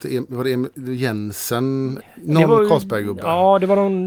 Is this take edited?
yes; 1 cut; at 2.0 s

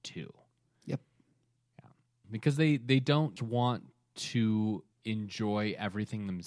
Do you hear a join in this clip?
yes; 3 cuts; at 2.2 s, 3.4 s, 4.9 s

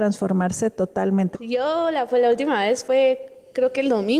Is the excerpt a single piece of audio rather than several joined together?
no; 1 cut; at 1.3 s

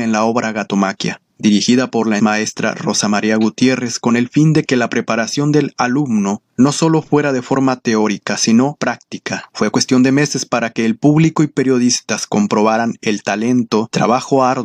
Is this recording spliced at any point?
yes; 2 cuts; at 2.2 s, 9.5 s

